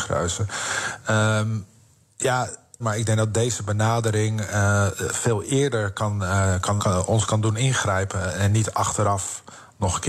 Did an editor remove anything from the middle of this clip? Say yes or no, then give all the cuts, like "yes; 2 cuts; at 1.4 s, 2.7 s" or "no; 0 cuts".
yes; 2 cuts; at 2.8 s, 6.8 s